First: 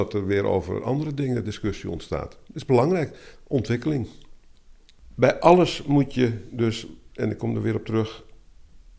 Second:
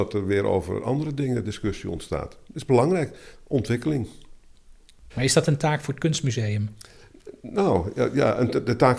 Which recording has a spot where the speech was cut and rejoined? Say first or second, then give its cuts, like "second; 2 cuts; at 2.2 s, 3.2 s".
second; 1 cut; at 5.1 s